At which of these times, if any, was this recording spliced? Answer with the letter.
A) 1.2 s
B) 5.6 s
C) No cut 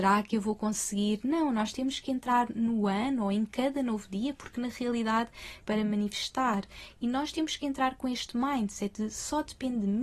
B